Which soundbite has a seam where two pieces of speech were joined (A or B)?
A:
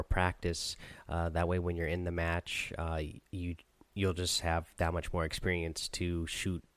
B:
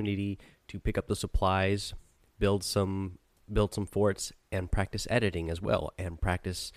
A